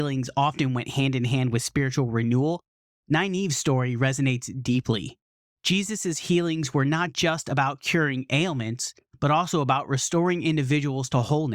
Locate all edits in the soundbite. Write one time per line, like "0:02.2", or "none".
none